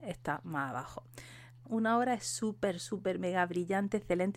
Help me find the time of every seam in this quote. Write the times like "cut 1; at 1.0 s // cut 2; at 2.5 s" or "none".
cut 1; at 1.6 s